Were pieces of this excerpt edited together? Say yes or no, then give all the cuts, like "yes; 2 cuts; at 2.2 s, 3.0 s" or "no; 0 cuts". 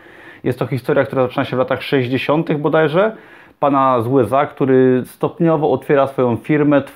no; 0 cuts